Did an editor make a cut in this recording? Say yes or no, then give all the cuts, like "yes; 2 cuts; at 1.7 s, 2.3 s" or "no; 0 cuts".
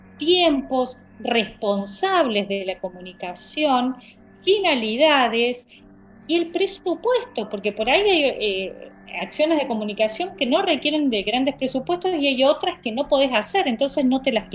no; 0 cuts